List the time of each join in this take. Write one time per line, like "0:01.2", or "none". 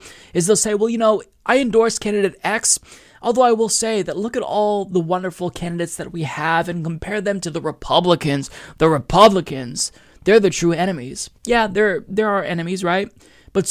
0:11.4